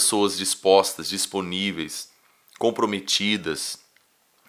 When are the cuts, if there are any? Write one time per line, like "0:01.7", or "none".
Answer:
none

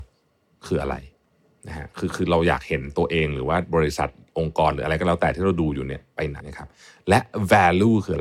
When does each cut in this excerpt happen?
0:06.4

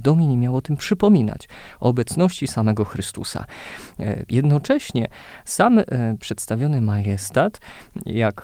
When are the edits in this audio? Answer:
0:04.3

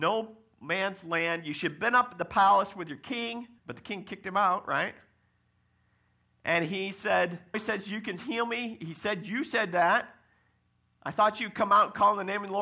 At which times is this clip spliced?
0:03.6
0:07.5

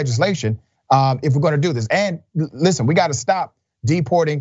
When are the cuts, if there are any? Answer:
none

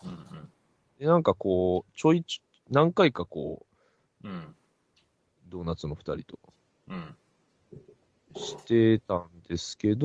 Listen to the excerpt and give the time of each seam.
0:04.2

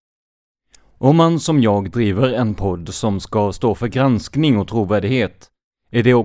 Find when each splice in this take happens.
none

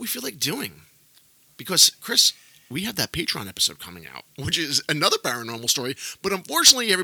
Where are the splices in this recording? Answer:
none

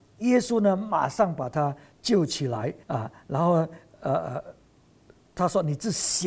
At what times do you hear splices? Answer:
0:02.8

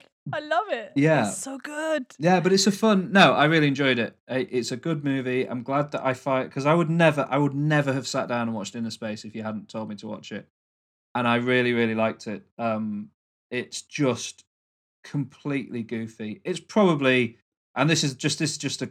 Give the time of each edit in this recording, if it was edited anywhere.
none

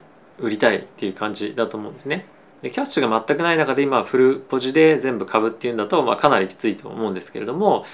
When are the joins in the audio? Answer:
0:02.5

